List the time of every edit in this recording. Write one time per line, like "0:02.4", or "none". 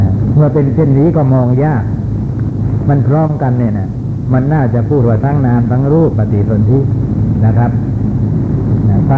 0:06.1